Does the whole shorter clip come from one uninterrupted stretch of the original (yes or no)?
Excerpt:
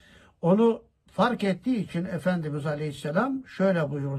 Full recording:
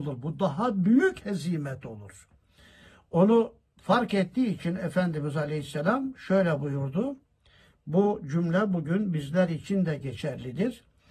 yes